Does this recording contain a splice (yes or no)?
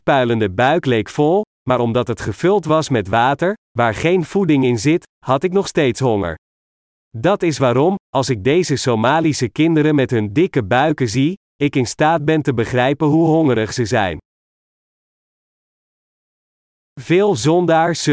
no